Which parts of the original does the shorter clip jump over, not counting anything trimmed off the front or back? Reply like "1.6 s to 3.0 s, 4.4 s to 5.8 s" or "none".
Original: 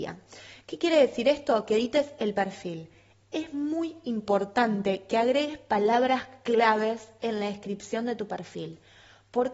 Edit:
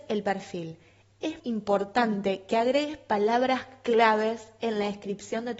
3.5 s to 4.0 s